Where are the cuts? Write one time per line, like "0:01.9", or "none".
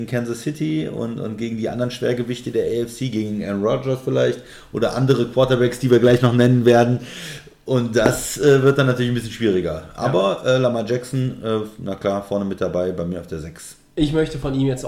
none